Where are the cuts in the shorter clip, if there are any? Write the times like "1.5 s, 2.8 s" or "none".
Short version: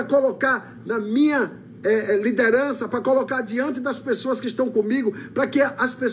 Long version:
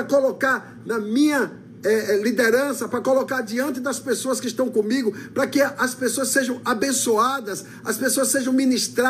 none